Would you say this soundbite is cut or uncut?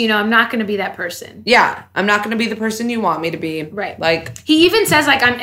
uncut